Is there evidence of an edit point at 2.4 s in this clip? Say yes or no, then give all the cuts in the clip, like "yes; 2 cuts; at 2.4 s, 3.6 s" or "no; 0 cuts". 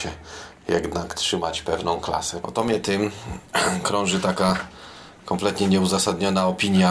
yes; 1 cut; at 2.4 s